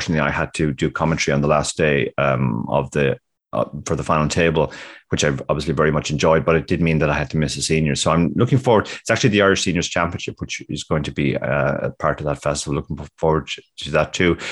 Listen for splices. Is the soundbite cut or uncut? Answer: uncut